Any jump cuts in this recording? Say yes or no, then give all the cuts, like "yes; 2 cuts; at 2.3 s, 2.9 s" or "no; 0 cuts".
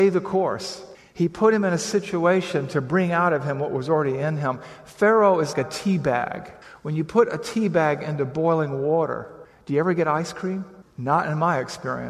yes; 1 cut; at 5.5 s